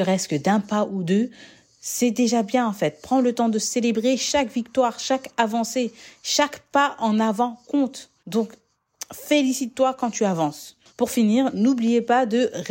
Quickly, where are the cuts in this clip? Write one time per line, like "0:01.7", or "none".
0:08.2
0:10.9